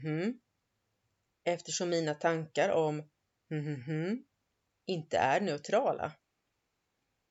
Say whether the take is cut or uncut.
uncut